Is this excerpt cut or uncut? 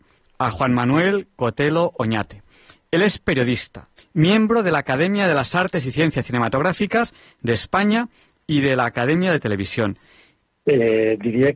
cut